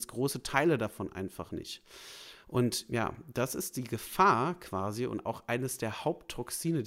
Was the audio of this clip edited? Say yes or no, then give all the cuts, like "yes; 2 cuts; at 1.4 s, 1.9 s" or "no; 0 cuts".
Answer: no; 0 cuts